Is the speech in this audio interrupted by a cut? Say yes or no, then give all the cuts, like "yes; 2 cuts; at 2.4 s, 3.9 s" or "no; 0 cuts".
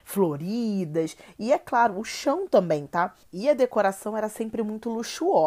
yes; 1 cut; at 3.2 s